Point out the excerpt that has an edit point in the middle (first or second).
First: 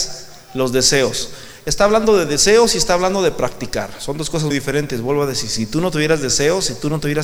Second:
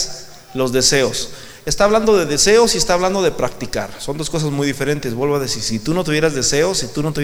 first